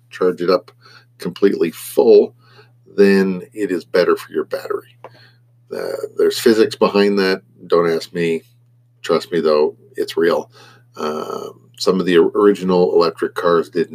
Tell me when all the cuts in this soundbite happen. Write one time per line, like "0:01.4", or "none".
none